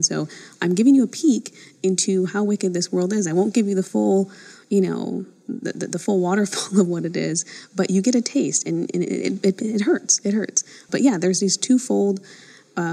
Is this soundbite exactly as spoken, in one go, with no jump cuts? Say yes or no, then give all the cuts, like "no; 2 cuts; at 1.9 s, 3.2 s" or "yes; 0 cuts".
yes; 0 cuts